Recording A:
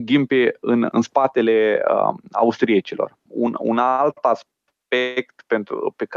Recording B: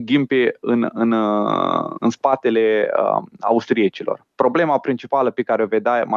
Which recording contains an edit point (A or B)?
A